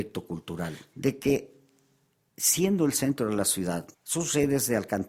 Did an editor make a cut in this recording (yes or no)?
yes